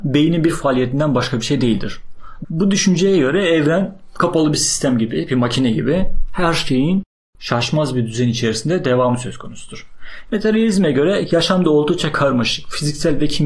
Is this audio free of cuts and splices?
no; 2 cuts; at 2.4 s, 10.3 s

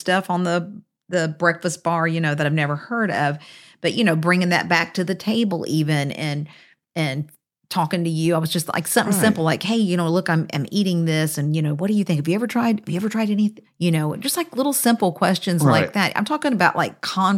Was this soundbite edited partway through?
yes; 1 cut; at 13.6 s

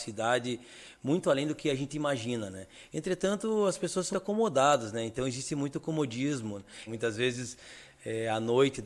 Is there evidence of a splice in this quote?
yes; 2 cuts; at 4.1 s, 6.9 s

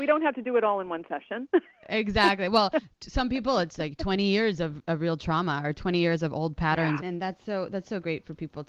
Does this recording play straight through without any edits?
no; 1 cut; at 7.0 s

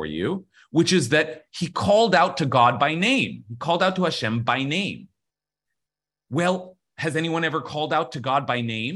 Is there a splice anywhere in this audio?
no; 0 cuts

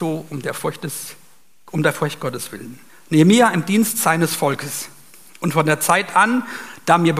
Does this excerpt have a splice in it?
yes; 1 cut; at 2.9 s

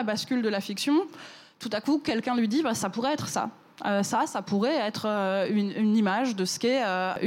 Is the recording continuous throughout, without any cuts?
yes; 0 cuts

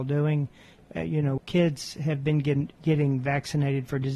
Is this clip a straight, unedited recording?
no; 1 cut; at 1.4 s

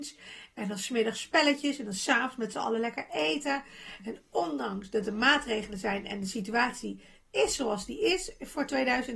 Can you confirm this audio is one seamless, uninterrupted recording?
yes; 0 cuts

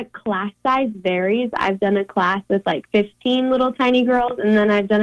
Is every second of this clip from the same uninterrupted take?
yes; 0 cuts

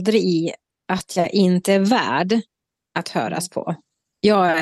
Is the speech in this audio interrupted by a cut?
no; 0 cuts

